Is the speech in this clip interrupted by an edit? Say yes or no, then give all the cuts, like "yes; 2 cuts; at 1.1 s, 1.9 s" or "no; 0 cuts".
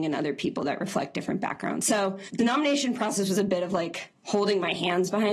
no; 0 cuts